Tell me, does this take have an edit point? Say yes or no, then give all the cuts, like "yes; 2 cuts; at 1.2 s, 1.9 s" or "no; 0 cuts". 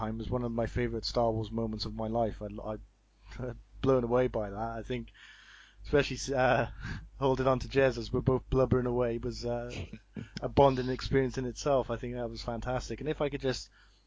no; 0 cuts